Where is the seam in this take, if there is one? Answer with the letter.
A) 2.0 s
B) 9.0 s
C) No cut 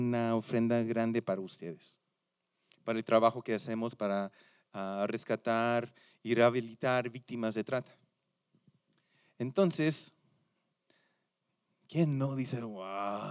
C